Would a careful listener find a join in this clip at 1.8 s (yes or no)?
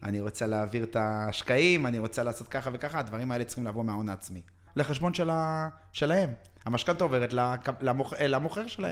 no